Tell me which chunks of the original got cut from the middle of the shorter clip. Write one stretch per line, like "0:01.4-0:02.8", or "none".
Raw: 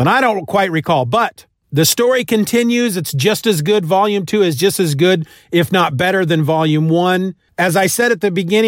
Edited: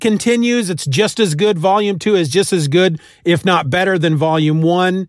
none